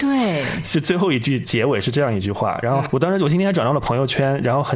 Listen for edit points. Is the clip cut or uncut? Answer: uncut